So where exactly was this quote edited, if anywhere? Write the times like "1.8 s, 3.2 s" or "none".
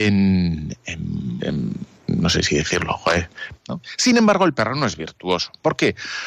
1.4 s, 3.5 s